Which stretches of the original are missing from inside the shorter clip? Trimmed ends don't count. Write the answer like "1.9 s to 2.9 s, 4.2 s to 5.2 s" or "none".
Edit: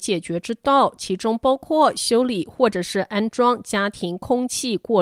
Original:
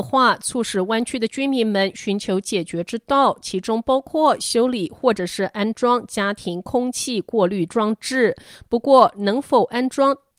none

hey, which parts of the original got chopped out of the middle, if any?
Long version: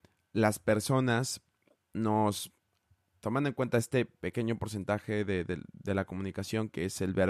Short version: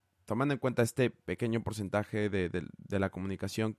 none

